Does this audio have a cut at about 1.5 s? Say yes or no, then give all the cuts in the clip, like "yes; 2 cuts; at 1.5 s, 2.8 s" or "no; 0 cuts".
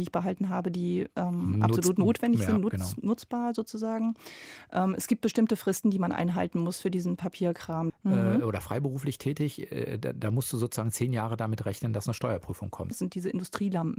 no; 2 cuts; at 7.9 s, 12.9 s